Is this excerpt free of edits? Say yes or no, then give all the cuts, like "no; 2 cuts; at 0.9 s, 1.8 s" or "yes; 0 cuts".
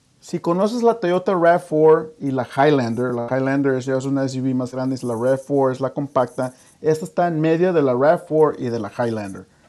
yes; 0 cuts